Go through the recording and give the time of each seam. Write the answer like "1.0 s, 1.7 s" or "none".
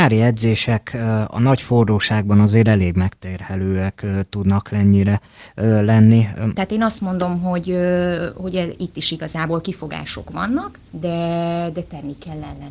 6.5 s, 10.9 s